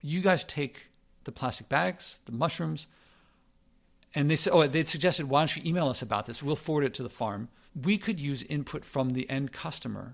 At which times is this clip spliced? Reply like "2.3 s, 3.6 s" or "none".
7.7 s